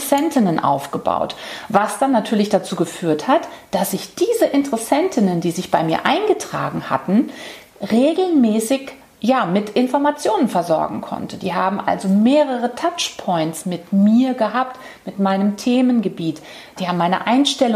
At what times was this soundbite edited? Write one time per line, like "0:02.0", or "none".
0:16.8